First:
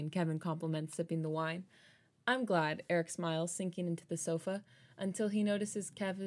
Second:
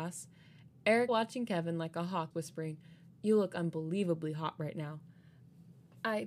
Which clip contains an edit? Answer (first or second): second